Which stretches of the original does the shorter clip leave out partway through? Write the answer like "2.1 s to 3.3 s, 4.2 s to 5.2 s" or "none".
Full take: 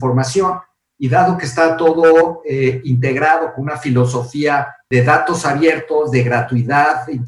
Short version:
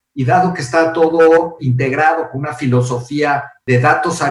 2.4 s to 2.8 s